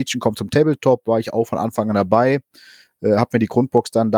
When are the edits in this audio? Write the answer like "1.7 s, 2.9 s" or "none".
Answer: none